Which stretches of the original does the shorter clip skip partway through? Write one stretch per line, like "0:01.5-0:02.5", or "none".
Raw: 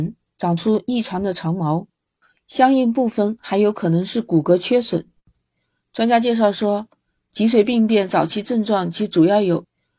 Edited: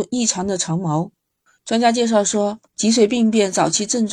0:02.3-0:05.9
0:07.0-0:07.2